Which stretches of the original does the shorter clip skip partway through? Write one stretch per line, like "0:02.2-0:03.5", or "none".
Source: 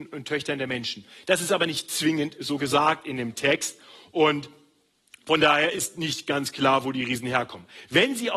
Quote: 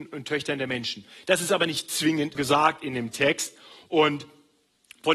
0:02.4-0:02.6